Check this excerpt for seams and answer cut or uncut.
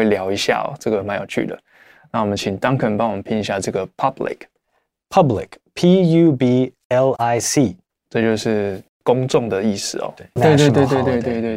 cut